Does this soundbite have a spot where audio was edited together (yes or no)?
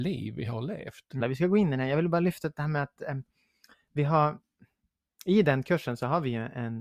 yes